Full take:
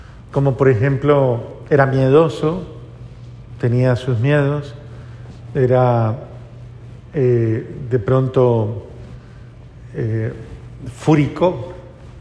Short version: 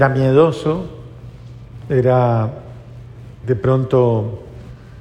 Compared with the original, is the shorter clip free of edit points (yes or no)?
no